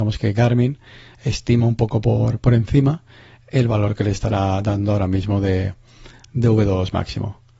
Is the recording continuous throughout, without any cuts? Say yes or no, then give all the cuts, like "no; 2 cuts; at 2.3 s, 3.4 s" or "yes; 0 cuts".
yes; 0 cuts